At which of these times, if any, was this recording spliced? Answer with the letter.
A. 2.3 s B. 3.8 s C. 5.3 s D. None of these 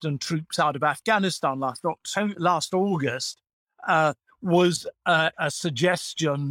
C